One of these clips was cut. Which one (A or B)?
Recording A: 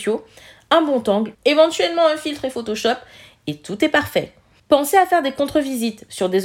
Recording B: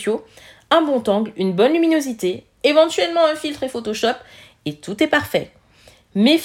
A